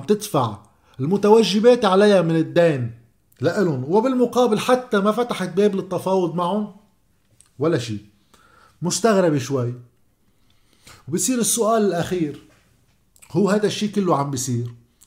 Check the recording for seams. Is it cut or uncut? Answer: uncut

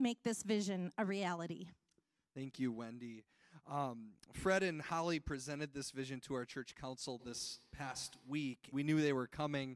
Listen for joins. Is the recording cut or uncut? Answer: cut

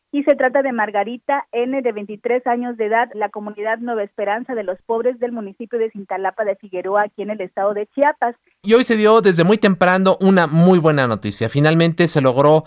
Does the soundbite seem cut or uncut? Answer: cut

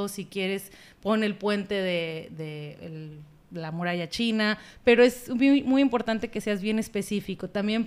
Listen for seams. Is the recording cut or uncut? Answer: cut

